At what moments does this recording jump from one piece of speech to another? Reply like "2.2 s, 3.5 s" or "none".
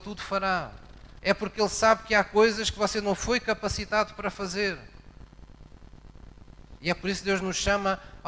1.2 s, 6.8 s

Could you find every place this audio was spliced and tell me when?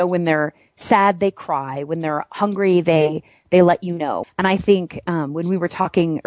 4.2 s

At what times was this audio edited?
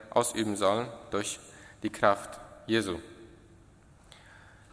none

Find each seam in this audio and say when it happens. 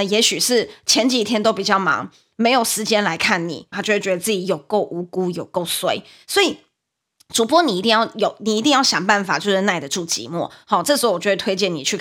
3.7 s

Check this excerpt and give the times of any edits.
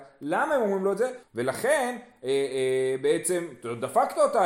1.2 s

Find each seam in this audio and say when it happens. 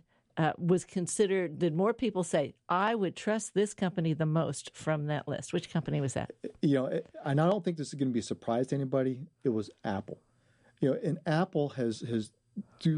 none

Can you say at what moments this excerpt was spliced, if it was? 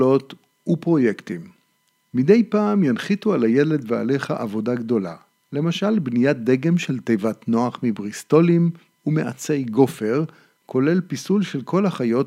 8.9 s

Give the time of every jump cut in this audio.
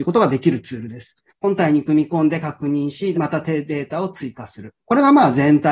1.3 s, 3.1 s

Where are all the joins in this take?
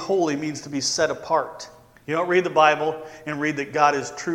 2.0 s

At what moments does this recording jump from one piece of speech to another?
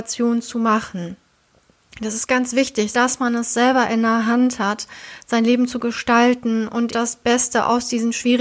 2.9 s, 6.9 s

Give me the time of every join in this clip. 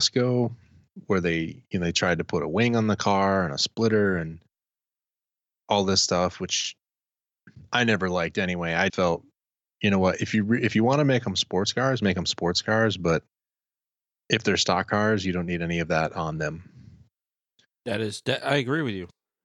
8.9 s

